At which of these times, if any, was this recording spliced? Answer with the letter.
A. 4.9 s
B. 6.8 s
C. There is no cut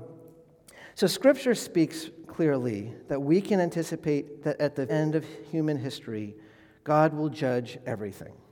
A